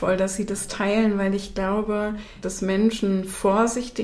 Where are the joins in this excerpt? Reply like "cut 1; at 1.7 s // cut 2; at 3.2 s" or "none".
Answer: cut 1; at 2.4 s